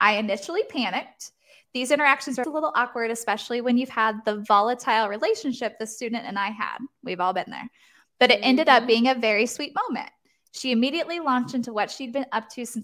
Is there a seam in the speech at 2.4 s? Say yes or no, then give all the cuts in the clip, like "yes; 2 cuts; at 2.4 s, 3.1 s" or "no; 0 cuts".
yes; 1 cut; at 2.4 s